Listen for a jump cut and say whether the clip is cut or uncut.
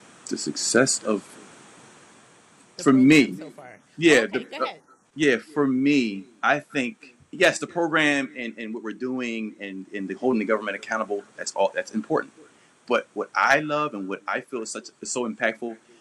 uncut